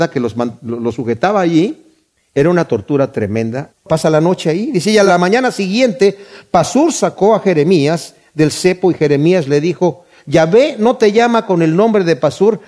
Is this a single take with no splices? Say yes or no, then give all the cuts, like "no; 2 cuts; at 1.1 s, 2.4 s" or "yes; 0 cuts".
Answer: no; 1 cut; at 3.7 s